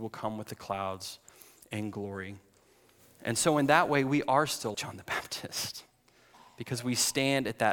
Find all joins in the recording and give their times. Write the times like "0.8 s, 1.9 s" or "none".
4.7 s